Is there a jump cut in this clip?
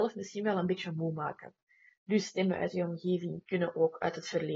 yes; 1 cut; at 1.9 s

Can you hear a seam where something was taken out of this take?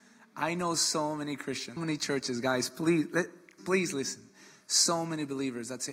yes; 2 cuts; at 1.8 s, 3.6 s

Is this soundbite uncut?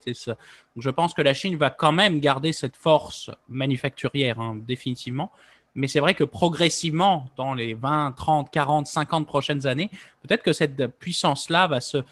yes; 0 cuts

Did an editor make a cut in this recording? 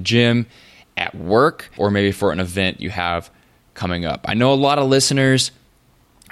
yes; 1 cut; at 1.8 s

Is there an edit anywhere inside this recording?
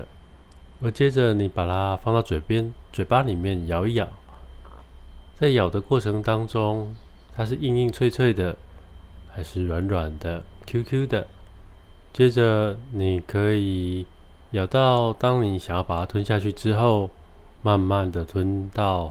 yes; 1 cut; at 7.3 s

